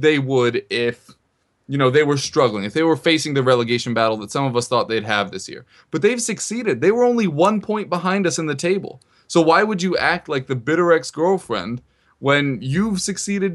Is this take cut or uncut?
uncut